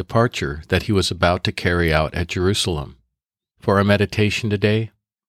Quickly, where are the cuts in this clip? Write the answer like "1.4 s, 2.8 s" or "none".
3.5 s